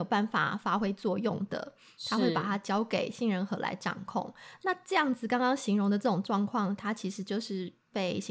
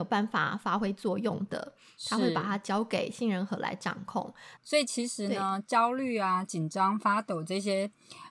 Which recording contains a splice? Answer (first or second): second